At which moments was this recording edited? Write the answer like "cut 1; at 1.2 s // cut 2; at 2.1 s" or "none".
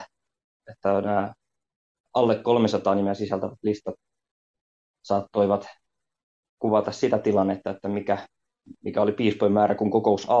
none